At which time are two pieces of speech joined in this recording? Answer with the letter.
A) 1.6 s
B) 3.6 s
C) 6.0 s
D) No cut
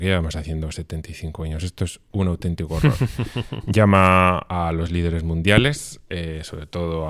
D